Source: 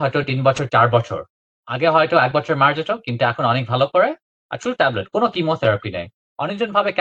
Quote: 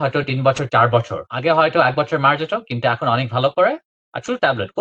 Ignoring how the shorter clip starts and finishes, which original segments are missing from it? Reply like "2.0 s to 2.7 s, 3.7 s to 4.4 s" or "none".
1.3 s to 1.6 s